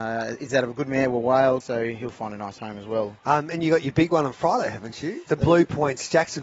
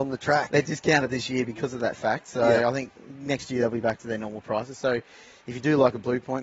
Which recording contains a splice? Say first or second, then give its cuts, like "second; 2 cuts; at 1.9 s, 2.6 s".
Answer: first; 3 cuts; at 1.6 s, 3.2 s, 5.3 s